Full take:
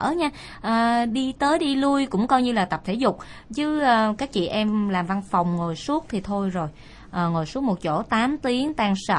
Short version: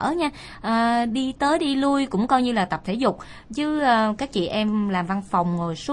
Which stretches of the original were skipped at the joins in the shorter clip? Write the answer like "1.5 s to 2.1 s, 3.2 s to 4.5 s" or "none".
none